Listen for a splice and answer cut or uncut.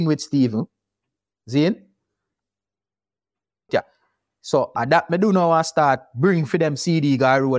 cut